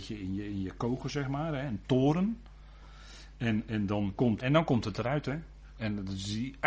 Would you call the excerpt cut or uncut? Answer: cut